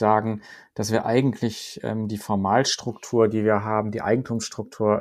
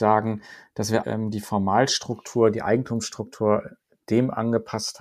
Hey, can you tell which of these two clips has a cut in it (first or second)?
second